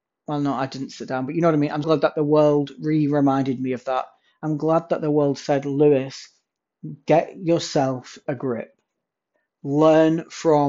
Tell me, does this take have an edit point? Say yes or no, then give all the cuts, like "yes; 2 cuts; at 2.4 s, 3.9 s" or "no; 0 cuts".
yes; 1 cut; at 1.8 s